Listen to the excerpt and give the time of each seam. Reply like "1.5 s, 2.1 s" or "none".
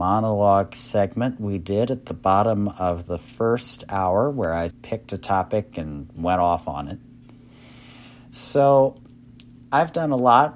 4.7 s